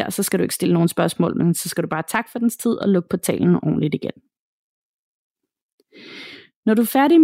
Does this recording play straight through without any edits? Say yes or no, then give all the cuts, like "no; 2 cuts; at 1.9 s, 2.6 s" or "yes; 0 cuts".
yes; 0 cuts